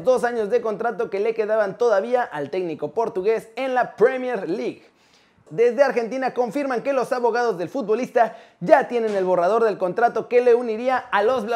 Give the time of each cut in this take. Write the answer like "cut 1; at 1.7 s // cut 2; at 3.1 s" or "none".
cut 1; at 5.5 s